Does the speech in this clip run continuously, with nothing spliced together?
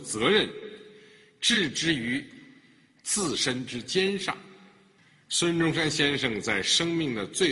yes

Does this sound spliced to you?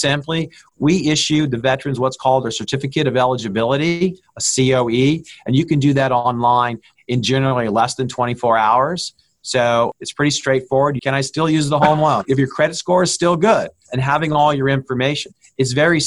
yes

